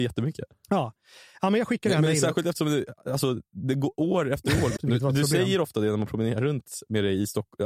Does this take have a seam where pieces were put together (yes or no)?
yes